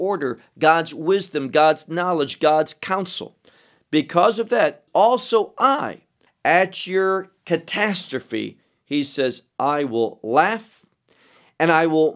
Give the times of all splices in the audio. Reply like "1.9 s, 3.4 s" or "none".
4.9 s, 6.3 s